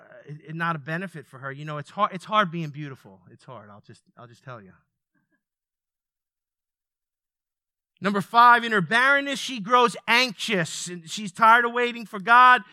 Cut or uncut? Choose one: uncut